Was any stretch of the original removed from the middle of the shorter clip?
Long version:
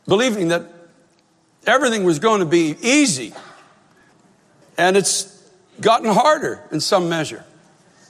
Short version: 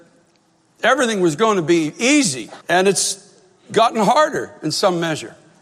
yes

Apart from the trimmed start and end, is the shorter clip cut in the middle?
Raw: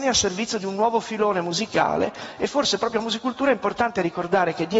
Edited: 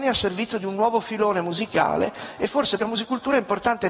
yes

